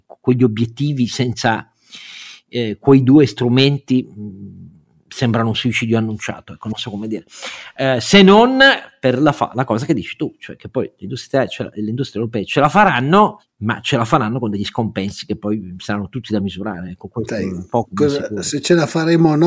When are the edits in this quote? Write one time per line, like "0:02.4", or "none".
none